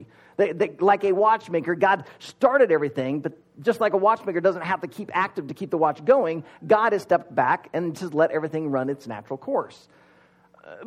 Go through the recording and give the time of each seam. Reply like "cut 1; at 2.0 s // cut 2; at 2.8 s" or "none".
cut 1; at 7.9 s